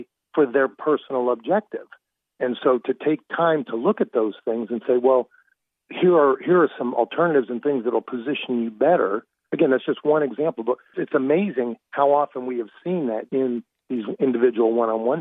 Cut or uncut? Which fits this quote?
cut